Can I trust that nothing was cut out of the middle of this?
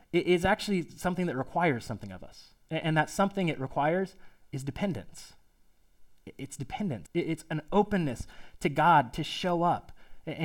no; 1 cut; at 7.1 s

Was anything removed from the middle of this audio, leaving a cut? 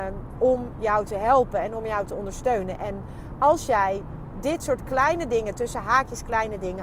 no; 0 cuts

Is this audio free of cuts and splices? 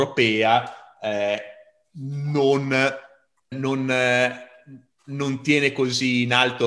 no; 1 cut; at 3.5 s

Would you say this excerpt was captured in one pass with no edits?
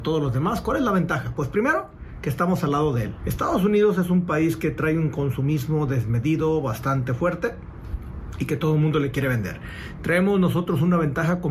no; 1 cut; at 3.2 s

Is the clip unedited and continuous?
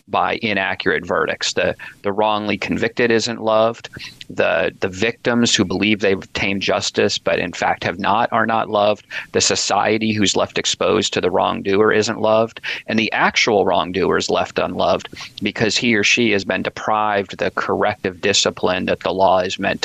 yes; 0 cuts

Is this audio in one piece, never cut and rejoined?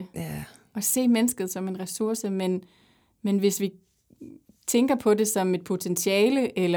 yes; 0 cuts

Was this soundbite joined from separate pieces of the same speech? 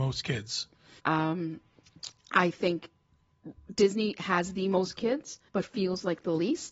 yes; 2 cuts; at 1.0 s, 5.5 s

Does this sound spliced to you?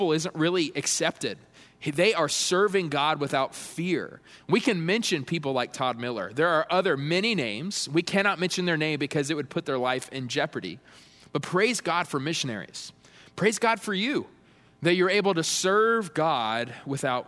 no; 0 cuts

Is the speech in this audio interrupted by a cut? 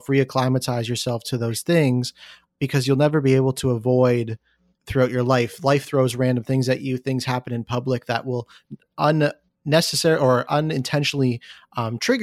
yes; 1 cut; at 8.8 s

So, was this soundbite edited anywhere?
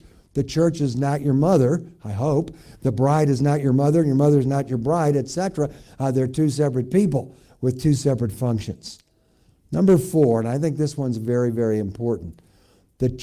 no; 0 cuts

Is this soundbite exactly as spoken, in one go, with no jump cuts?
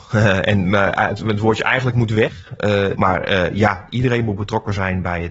no; 1 cut; at 2.9 s

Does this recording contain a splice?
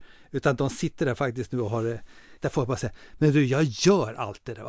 yes; 1 cut; at 2.4 s

